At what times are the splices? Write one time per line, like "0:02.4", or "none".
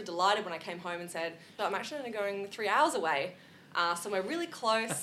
0:01.6